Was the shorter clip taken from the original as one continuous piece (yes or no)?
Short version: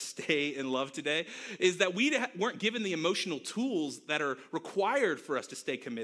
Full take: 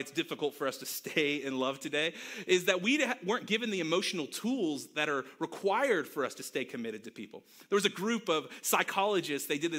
yes